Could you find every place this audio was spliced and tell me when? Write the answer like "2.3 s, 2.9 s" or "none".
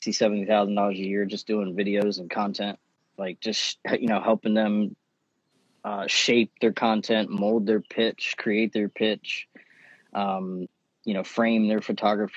none